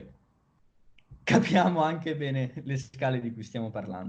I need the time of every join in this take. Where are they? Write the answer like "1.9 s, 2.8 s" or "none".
none